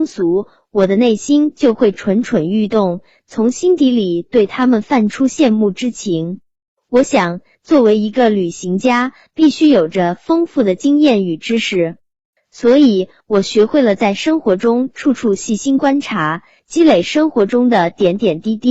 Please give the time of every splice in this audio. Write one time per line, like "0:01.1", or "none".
none